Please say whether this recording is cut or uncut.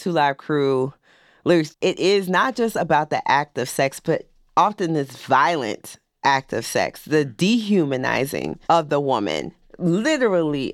cut